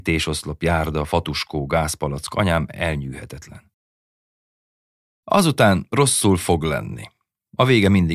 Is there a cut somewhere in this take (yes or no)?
no